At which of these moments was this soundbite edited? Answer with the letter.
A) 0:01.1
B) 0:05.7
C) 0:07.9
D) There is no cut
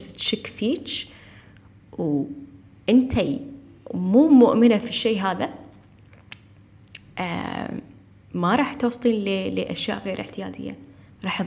D